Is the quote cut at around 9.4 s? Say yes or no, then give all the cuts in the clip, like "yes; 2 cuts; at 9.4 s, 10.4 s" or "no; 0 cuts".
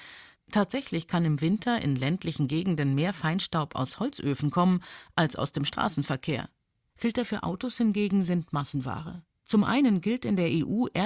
yes; 2 cuts; at 6.9 s, 9.4 s